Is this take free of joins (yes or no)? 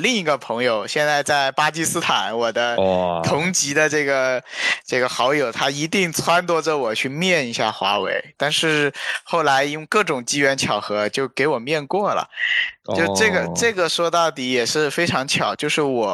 no